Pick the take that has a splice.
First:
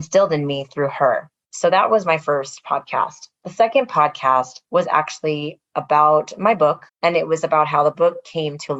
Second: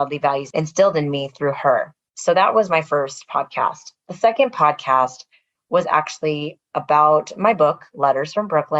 first; 2 cuts; at 4.6 s, 6.9 s

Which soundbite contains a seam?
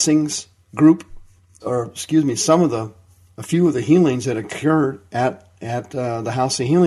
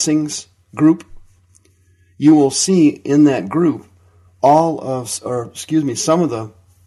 first; 1 cut; at 1.6 s

